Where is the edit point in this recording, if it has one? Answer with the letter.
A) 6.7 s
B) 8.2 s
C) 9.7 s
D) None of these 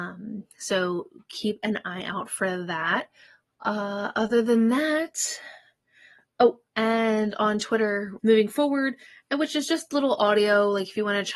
B